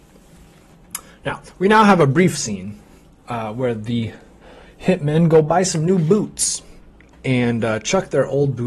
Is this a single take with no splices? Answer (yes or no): yes